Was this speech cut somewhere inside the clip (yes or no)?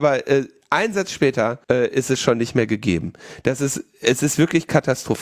yes